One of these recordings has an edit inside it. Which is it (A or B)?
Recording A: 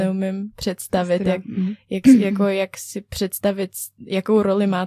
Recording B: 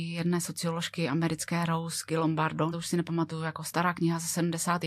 B